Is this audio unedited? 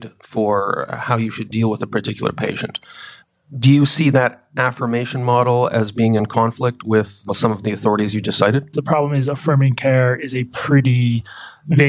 no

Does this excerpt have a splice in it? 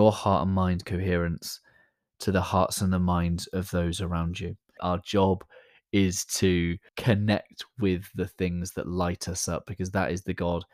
yes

